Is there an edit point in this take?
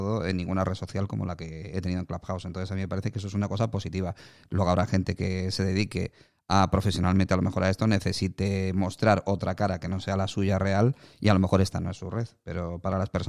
no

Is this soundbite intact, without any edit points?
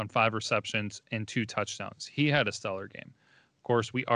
yes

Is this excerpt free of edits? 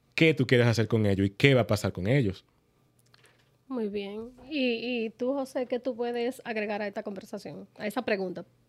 yes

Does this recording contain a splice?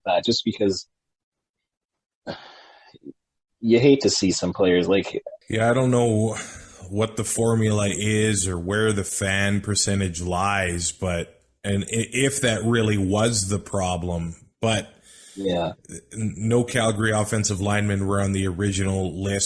yes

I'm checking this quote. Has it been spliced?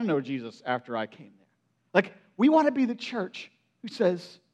no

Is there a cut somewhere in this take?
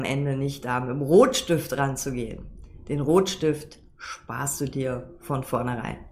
no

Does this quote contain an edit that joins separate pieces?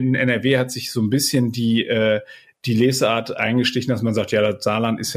no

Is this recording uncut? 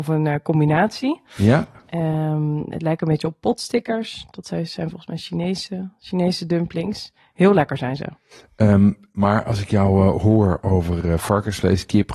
yes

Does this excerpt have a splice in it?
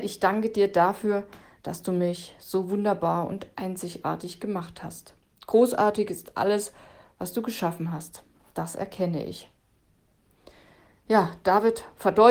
no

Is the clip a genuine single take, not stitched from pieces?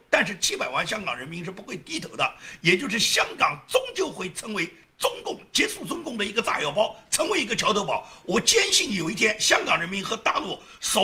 yes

